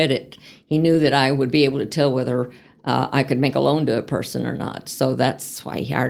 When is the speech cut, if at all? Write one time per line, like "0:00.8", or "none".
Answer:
none